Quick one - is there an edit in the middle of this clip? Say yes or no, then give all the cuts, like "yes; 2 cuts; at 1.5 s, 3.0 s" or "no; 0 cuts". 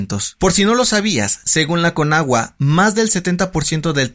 no; 0 cuts